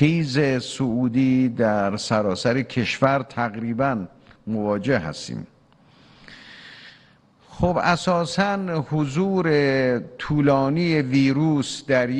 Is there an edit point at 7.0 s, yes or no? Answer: no